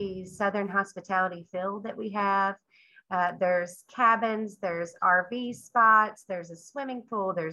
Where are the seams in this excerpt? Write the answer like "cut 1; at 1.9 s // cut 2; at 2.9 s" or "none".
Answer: none